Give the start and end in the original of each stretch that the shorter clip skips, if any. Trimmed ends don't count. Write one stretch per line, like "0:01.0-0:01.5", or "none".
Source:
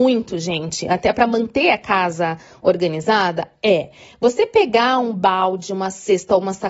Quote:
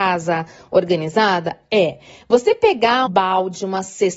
0:05.0-0:05.1